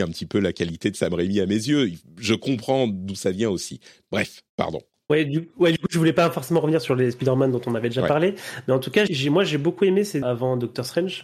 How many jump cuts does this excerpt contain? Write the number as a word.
three